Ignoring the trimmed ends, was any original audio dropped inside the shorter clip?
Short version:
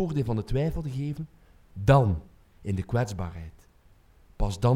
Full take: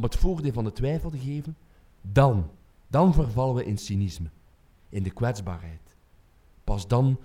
yes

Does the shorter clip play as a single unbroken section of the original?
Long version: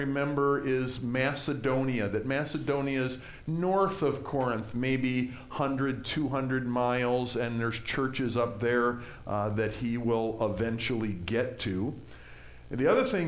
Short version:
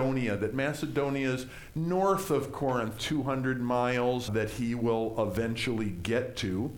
no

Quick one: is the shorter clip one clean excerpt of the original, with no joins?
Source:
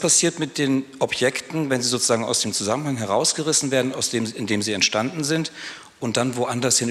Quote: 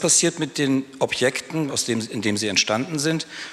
no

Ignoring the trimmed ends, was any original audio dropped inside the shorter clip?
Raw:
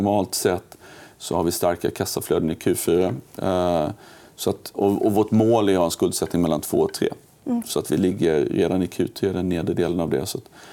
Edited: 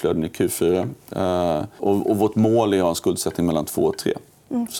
yes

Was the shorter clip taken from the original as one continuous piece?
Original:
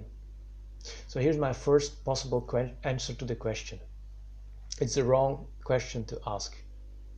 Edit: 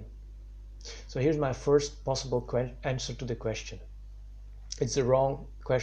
yes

